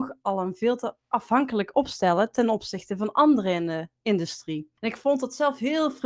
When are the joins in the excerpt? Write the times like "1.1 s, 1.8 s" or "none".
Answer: 4.8 s